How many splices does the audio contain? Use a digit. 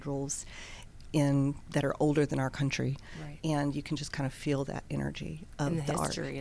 1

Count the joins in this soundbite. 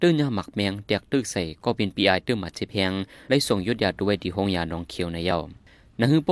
0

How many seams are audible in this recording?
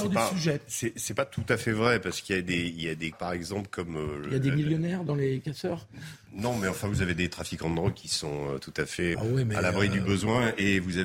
2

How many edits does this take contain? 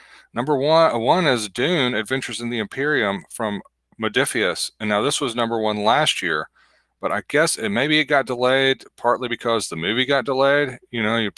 0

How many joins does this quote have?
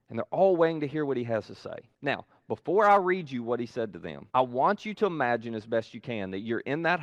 2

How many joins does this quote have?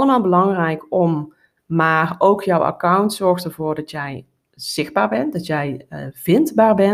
1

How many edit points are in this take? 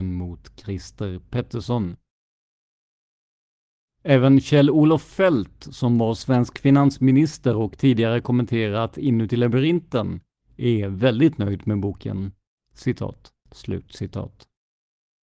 1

